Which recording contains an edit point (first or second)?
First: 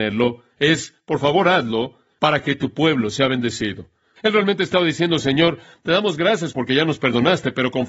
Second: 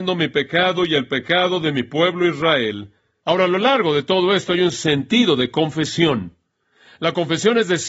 first